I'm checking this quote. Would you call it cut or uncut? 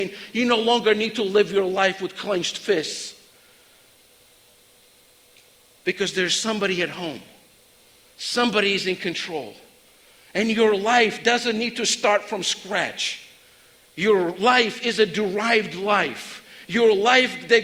uncut